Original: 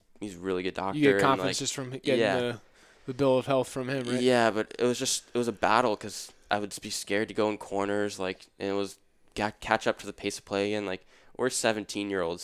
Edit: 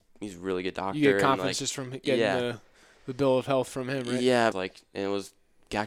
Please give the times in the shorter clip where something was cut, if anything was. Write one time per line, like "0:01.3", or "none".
0:04.5